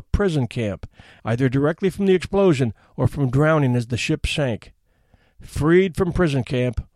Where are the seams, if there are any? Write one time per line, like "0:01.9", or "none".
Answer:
0:01.2

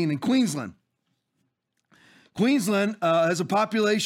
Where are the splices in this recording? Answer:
none

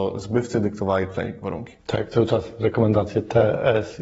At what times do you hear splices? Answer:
0:01.8

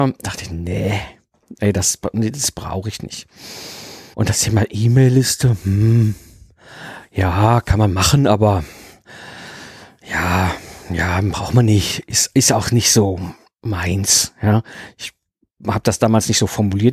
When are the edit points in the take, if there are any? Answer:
0:04.1

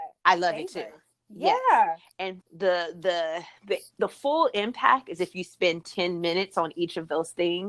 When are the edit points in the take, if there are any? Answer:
0:02.4
0:03.6

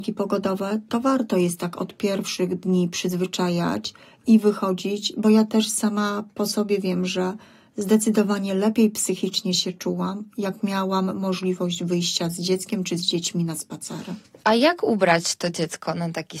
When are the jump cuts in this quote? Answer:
none

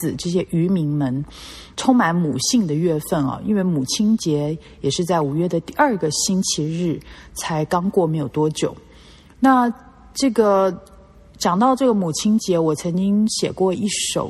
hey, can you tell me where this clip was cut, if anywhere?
0:01.7

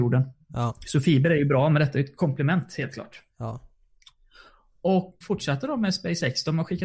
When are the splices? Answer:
0:05.2

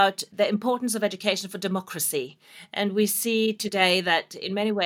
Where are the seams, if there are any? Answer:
none

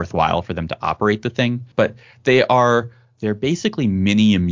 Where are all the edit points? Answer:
0:01.7
0:03.2

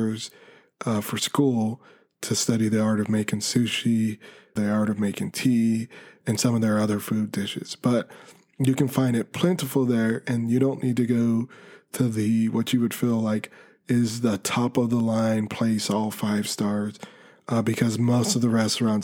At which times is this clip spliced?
0:04.6

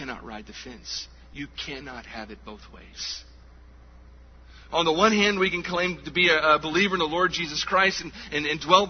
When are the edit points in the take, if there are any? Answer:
0:04.7

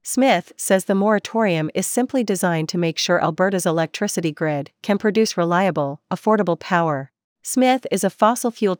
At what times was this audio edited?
0:07.3

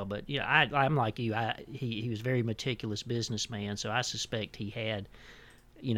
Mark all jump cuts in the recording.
none

